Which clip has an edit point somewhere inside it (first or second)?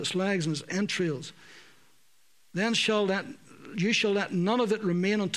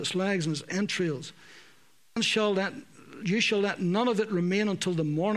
second